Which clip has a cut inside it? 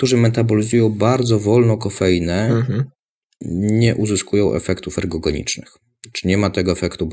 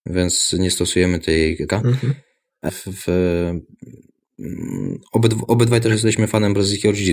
second; 2 cuts; at 1.7 s, 2.7 s

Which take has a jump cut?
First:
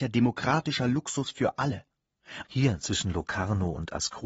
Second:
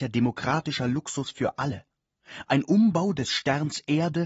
first; 1 cut; at 2.4 s

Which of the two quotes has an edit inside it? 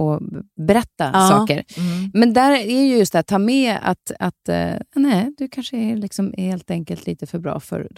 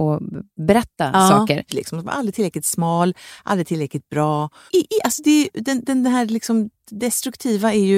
second; 2 cuts; at 1.7 s, 4.7 s

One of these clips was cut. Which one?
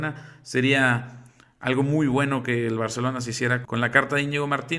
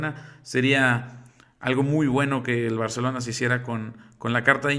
first; 1 cut; at 3.6 s

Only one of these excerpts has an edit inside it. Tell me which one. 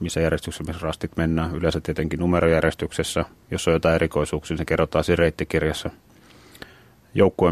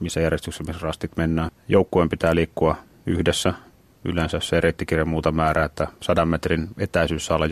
second; 1 cut; at 1.5 s

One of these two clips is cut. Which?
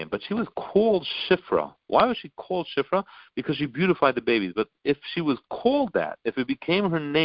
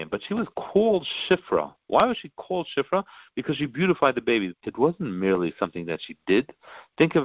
second; 1 cut; at 4.5 s

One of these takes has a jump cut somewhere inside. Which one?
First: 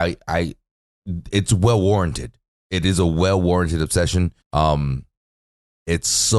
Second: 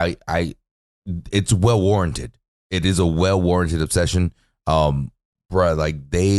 first; 1 cut; at 4.4 s

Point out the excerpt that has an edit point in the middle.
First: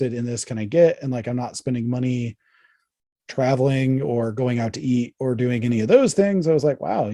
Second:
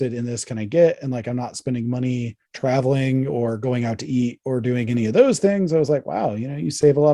second; 1 cut; at 2.4 s

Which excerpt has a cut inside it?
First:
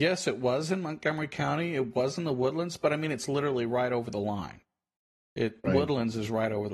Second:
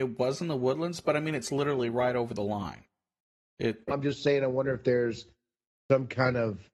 second; 1 cut; at 3.9 s

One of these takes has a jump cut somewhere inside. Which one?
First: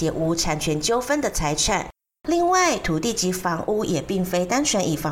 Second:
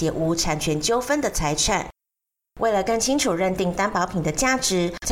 first; 1 cut; at 2.2 s

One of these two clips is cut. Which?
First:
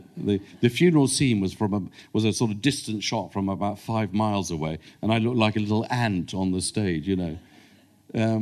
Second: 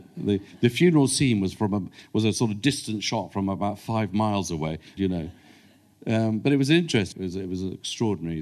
second; 2 cuts; at 5.0 s, 7.1 s

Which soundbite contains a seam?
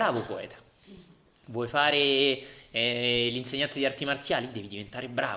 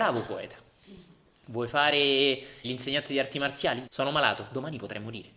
second; 2 cuts; at 2.6 s, 3.9 s

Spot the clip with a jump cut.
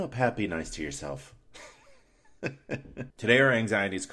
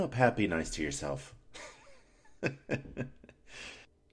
first; 1 cut; at 3.1 s

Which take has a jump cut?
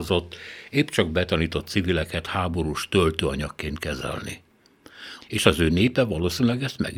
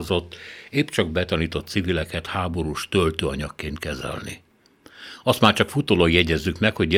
first; 1 cut; at 5.2 s

